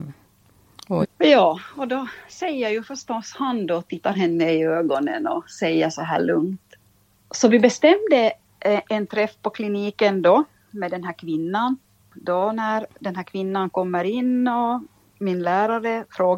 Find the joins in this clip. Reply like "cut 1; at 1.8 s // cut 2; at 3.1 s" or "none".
cut 1; at 1.0 s // cut 2; at 7.2 s